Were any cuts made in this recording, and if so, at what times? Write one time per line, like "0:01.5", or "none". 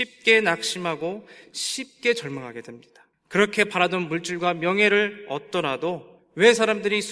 none